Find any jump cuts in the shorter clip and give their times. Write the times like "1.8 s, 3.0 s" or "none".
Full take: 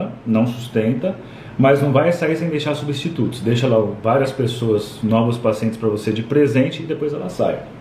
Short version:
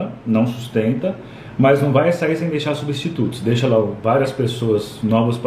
none